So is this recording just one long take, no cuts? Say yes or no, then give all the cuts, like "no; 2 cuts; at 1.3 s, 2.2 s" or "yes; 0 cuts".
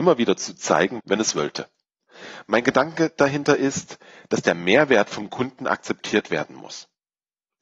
no; 1 cut; at 1.0 s